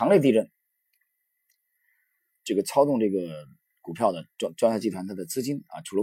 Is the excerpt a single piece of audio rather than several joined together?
no; 1 cut; at 2.3 s

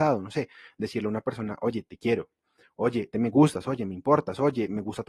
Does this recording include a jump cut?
yes; 1 cut; at 3.1 s

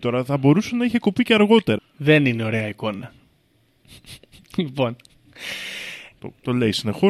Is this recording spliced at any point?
yes; 2 cuts; at 1.8 s, 6.1 s

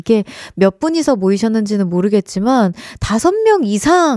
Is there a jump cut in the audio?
no; 0 cuts

